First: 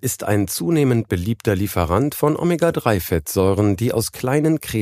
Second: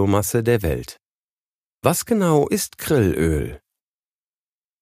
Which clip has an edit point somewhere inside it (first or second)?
second